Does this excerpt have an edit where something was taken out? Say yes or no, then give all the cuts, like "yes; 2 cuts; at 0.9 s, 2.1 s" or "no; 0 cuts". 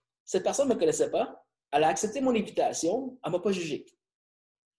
no; 0 cuts